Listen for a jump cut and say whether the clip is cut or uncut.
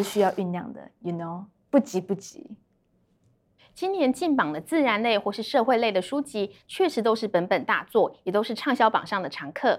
uncut